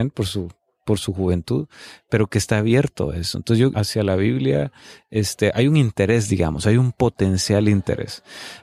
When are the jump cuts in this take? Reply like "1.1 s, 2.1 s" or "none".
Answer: 3.7 s